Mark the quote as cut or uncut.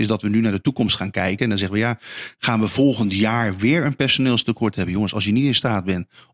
uncut